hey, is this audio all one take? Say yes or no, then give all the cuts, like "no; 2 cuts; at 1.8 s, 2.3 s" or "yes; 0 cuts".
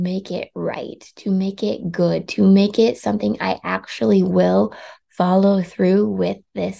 yes; 0 cuts